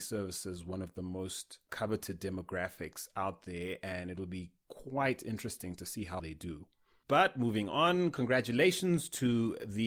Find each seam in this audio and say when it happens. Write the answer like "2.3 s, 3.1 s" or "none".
1.7 s, 6.2 s